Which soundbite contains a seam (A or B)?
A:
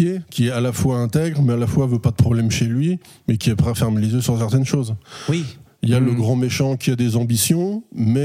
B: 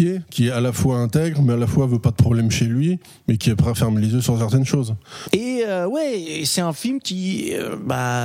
B